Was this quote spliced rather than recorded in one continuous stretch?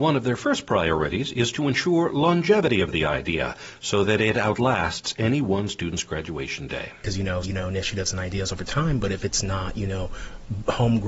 yes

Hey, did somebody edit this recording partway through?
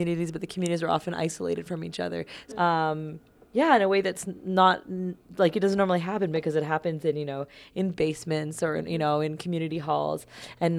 yes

